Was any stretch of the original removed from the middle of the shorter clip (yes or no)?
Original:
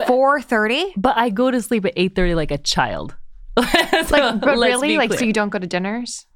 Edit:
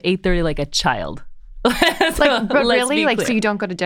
no